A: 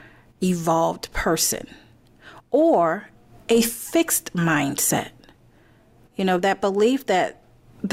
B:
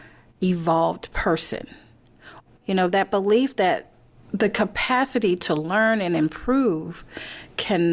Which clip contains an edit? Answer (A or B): B